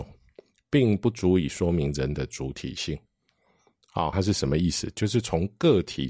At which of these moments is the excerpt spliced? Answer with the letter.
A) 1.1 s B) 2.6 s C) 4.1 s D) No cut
C